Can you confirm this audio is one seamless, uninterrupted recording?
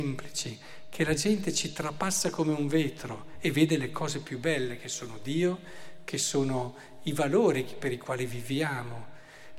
yes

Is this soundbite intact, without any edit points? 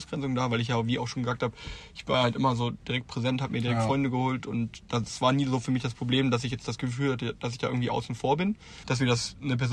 no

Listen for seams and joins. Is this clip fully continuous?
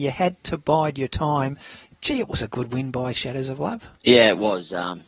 no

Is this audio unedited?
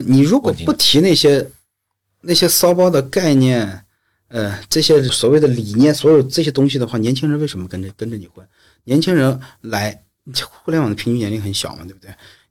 no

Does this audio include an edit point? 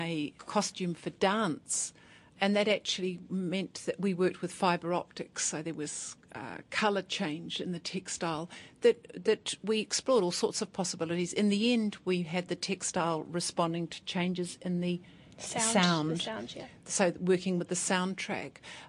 no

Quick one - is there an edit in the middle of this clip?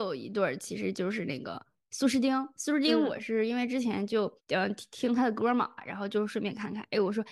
yes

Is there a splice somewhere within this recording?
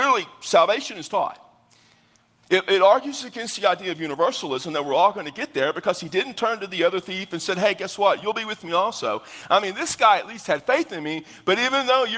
no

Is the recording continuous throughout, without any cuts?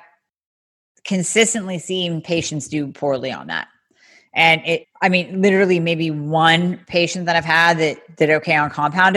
no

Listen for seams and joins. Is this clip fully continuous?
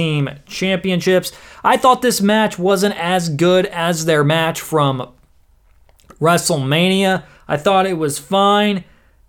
yes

